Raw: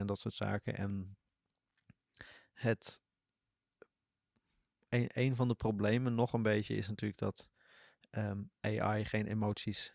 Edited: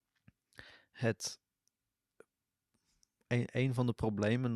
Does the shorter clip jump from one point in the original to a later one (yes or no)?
no